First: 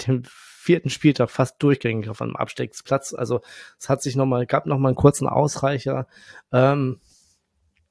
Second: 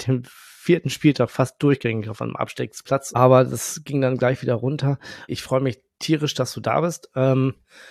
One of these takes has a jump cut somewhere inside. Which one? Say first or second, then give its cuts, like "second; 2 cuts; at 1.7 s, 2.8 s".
second; 2 cuts; at 3.1 s, 5.3 s